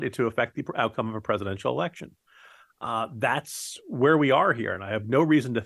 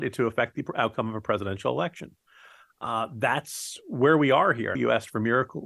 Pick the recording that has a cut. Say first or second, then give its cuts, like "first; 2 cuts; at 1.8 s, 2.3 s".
second; 1 cut; at 4.7 s